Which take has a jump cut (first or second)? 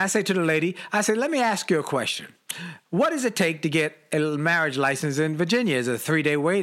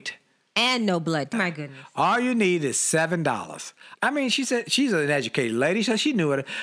second